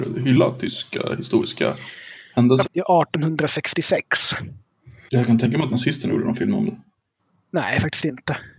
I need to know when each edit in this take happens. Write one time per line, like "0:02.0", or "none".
0:02.6